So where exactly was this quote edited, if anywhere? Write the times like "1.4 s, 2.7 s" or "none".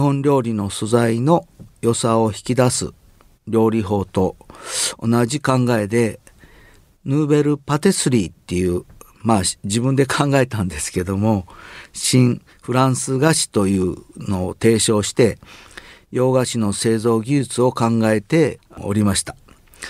none